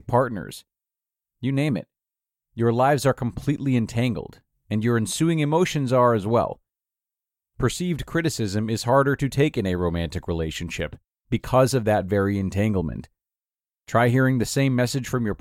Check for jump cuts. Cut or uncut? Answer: uncut